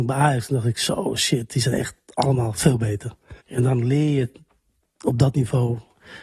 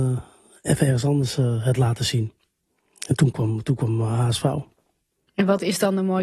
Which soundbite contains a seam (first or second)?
first